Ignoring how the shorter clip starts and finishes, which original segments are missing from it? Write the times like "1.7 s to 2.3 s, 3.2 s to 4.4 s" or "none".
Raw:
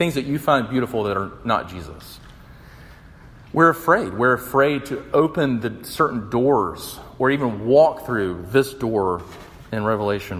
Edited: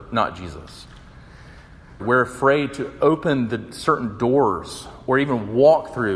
3.3 s to 4.1 s